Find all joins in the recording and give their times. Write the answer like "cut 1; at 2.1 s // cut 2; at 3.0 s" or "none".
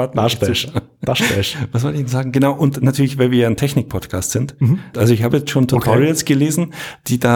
cut 1; at 4.9 s